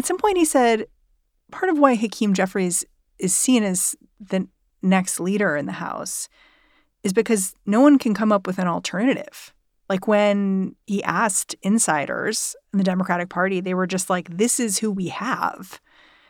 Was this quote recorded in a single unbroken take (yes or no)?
yes